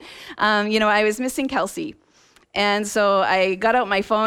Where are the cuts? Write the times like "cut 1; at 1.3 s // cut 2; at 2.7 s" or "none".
none